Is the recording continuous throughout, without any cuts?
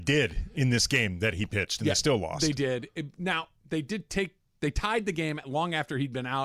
yes; 0 cuts

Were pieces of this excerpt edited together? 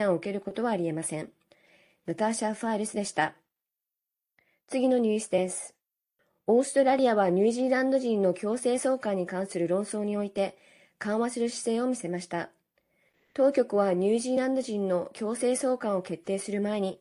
no; 0 cuts

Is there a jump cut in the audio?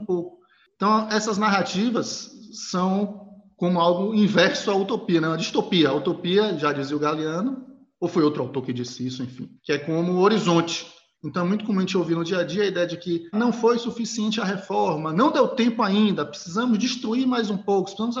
yes; 3 cuts; at 9.6 s, 11.1 s, 13.3 s

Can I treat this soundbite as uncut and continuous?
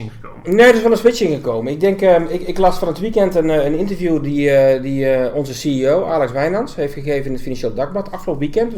yes; 0 cuts

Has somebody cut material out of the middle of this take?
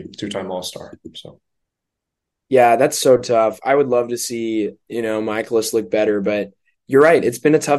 no; 0 cuts

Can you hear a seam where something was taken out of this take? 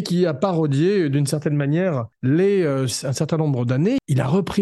yes; 1 cut; at 2.9 s

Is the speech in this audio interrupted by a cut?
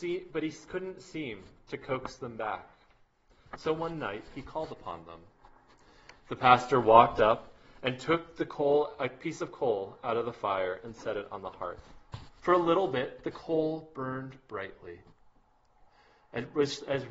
yes; 2 cuts; at 6.2 s, 12.4 s

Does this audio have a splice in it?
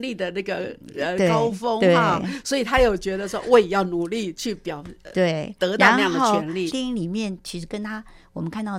yes; 1 cut; at 6.7 s

